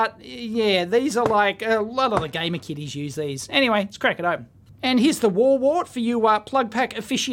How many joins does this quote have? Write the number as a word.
zero